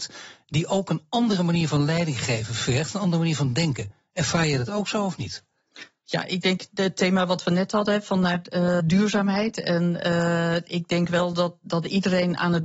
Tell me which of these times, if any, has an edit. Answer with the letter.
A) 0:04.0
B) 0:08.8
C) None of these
B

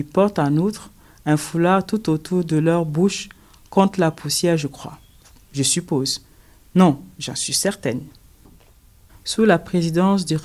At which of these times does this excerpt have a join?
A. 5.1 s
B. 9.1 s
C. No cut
B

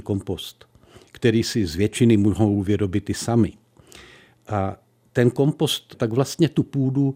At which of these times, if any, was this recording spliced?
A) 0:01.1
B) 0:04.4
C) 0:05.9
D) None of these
C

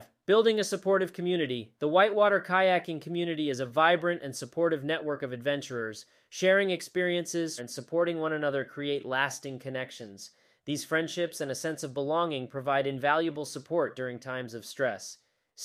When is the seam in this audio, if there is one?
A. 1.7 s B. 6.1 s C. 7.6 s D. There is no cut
C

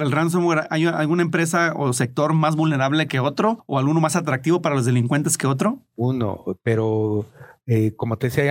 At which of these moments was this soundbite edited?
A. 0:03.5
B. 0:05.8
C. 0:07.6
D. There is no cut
D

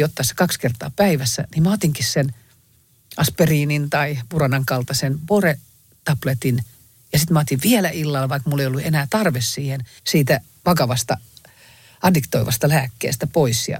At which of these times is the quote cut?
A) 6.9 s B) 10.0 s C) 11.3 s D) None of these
B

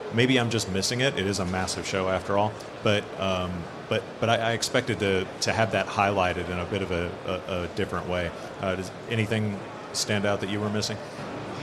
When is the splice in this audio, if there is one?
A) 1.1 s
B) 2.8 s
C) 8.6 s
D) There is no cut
D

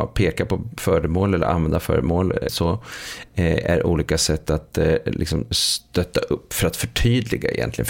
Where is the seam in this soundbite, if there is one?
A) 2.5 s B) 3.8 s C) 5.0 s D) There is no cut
A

